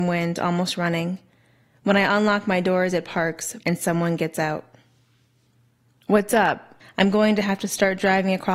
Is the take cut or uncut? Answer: cut